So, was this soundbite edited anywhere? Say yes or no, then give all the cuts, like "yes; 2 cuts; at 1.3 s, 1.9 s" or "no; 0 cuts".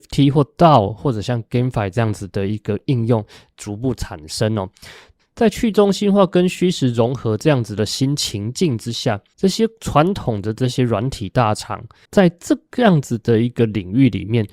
yes; 2 cuts; at 9.3 s, 12.1 s